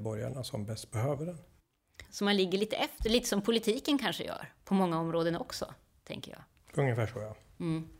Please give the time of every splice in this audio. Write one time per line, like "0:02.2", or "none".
0:02.1